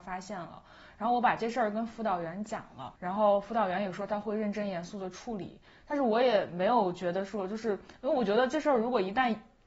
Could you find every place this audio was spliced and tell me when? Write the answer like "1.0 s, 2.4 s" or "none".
3.0 s